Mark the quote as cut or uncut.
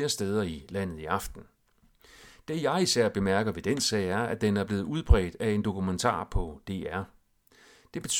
uncut